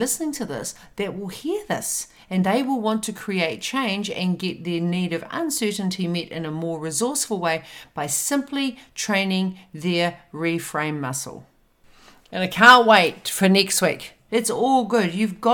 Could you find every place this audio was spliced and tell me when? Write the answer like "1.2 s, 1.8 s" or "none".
14.3 s